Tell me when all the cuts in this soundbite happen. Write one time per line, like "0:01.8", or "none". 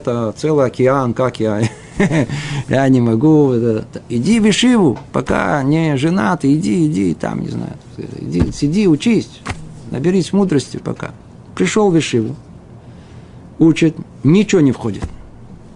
none